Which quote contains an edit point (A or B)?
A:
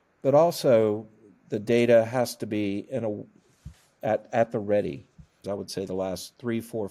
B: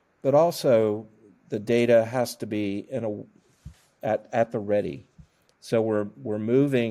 A